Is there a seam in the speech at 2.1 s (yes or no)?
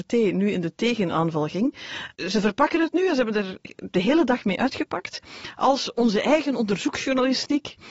no